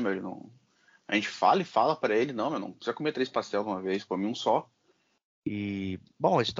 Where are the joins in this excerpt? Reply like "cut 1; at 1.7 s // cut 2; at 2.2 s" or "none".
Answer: cut 1; at 5.4 s